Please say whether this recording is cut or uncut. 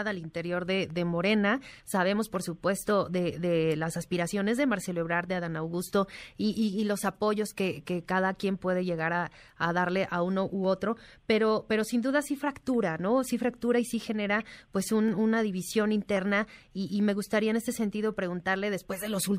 cut